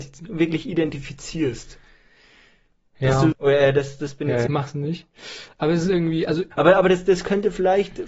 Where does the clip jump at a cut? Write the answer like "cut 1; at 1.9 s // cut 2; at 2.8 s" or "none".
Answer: cut 1; at 3.3 s // cut 2; at 4.5 s // cut 3; at 6.5 s